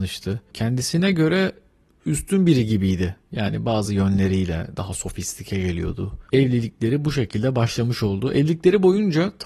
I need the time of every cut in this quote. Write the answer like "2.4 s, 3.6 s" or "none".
none